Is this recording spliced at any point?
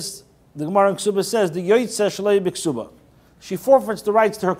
no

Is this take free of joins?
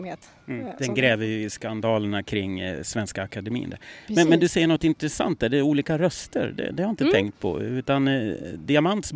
yes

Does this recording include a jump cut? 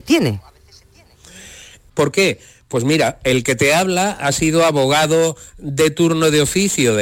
yes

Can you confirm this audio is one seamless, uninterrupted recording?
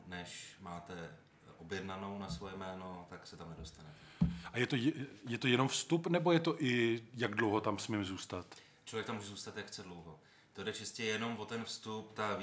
yes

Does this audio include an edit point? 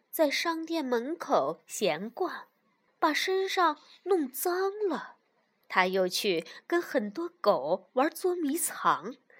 yes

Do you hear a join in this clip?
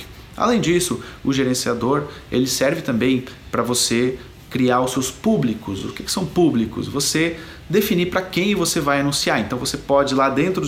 no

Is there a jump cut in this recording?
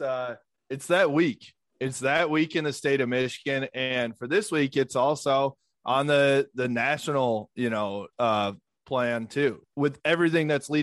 yes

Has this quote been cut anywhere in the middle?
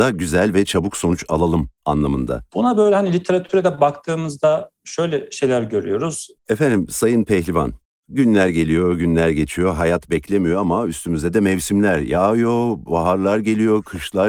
yes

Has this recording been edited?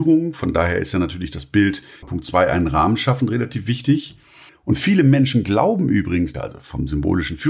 yes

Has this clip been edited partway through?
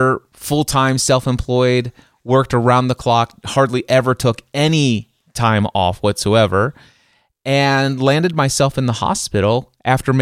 no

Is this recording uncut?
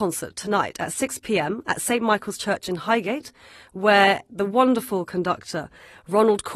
yes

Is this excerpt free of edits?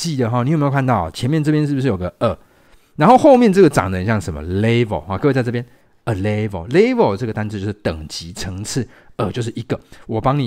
yes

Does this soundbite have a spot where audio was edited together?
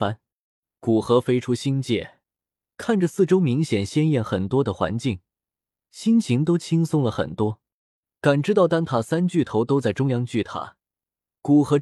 no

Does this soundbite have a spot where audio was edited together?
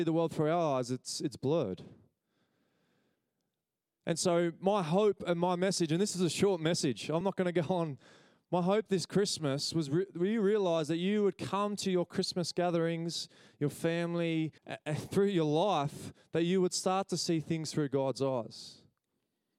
yes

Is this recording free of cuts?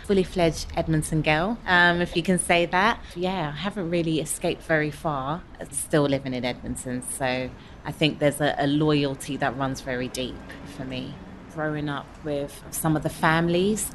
no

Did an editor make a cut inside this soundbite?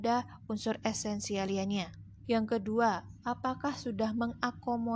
yes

